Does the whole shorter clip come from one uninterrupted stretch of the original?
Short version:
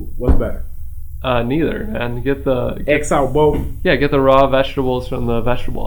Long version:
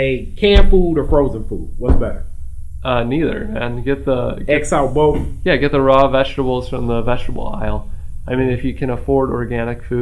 yes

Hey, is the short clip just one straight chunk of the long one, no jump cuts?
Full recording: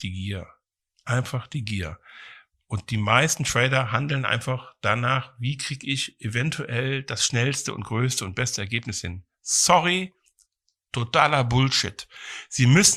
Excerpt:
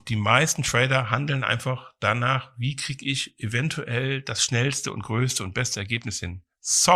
yes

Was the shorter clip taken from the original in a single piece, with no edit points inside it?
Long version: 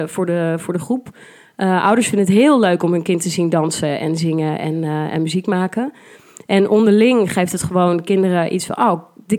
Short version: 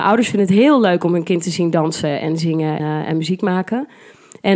no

